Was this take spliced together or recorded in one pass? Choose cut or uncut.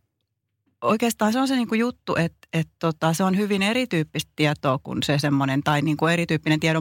uncut